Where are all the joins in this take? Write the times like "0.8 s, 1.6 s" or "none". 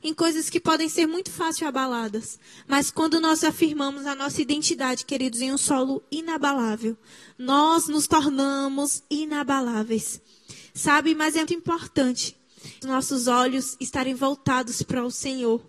11.5 s, 12.8 s